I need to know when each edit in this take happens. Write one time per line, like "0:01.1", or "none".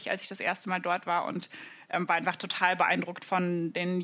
none